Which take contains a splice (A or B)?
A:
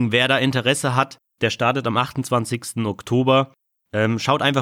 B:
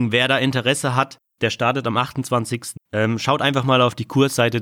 B